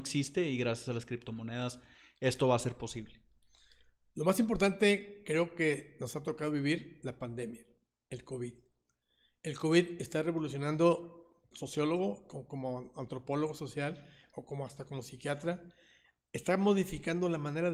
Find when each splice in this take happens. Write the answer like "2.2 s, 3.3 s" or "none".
11.5 s